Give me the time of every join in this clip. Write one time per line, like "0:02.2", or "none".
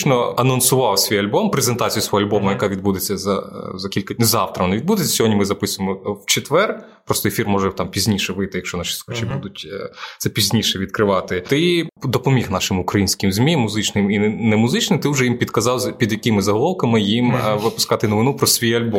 none